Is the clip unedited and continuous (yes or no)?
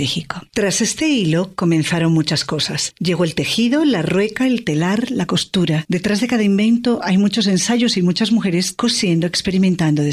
no